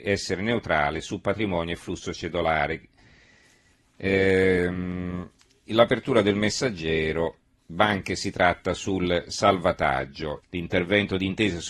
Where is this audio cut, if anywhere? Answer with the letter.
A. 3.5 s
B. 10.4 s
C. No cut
B